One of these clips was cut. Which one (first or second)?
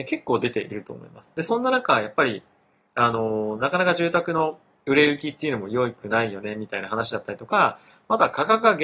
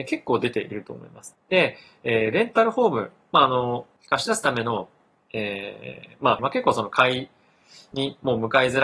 second